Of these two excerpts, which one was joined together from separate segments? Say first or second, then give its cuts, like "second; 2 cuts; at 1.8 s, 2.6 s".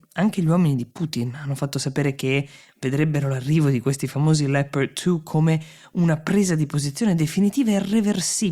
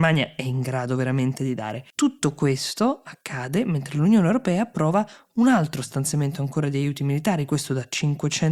second; 1 cut; at 1.9 s